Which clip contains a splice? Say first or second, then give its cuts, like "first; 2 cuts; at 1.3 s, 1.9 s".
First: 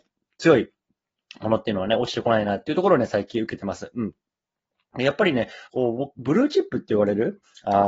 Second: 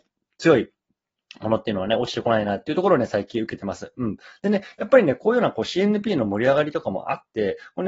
first; 2 cuts; at 3.9 s, 5.7 s